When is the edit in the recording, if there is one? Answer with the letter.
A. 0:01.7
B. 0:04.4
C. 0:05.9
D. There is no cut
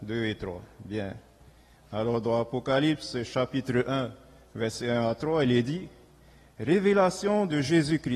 A